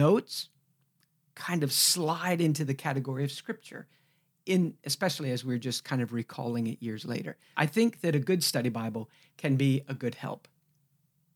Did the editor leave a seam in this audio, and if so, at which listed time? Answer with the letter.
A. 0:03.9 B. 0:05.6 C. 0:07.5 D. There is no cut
C